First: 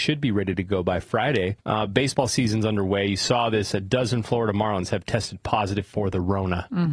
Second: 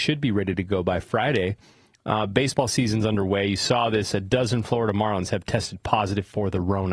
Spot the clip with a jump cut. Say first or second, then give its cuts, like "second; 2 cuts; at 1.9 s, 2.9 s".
first; 1 cut; at 1.6 s